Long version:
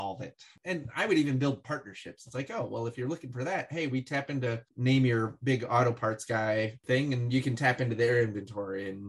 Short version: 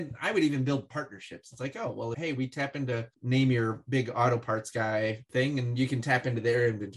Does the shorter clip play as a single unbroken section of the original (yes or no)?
no